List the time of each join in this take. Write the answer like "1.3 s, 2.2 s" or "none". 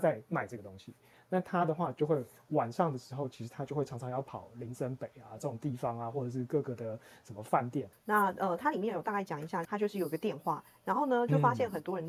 7.9 s, 9.7 s